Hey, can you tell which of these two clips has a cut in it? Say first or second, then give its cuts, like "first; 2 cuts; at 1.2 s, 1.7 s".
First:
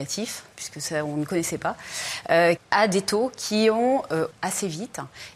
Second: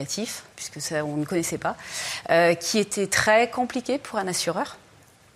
first; 2 cuts; at 2.6 s, 4.3 s